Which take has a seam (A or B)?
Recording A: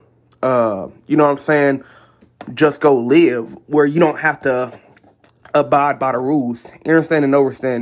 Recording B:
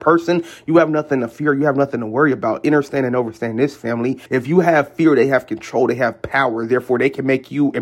B